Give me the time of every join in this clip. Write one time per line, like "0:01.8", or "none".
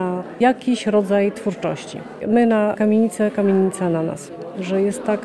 0:02.2